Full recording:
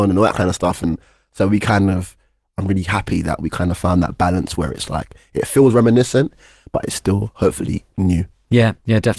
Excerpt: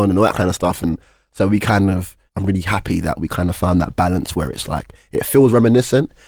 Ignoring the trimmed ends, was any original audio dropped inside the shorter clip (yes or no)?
yes